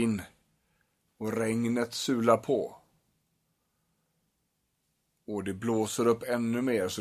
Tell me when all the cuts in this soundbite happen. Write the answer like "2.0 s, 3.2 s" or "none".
1.1 s